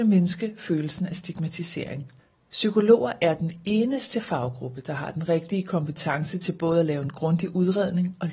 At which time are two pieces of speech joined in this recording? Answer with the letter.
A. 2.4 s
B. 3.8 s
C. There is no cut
A